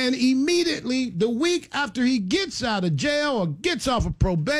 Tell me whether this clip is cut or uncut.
uncut